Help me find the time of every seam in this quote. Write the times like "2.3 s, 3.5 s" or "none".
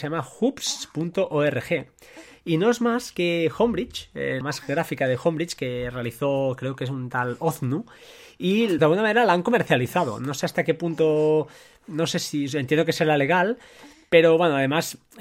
4.4 s, 8.8 s